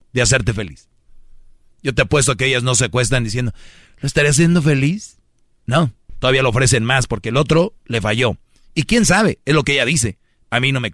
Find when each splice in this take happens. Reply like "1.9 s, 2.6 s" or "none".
6.1 s